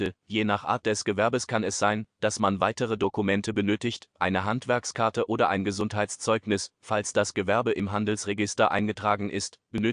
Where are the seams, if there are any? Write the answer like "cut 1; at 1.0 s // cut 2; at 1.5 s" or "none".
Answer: cut 1; at 4.1 s